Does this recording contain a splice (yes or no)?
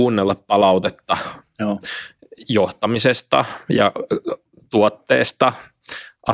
no